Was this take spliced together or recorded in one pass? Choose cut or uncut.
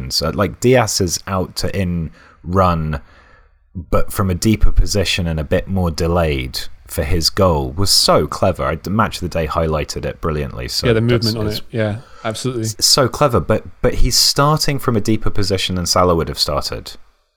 cut